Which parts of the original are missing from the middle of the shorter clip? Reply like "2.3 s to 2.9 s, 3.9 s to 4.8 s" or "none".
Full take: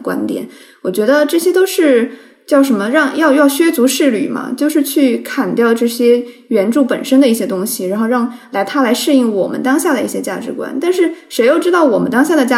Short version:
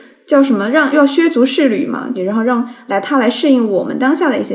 3.1 s to 3.3 s, 4.6 s to 7.8 s